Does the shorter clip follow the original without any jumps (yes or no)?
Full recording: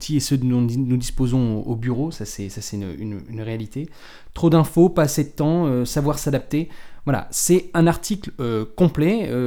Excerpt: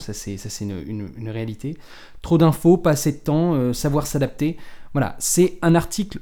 yes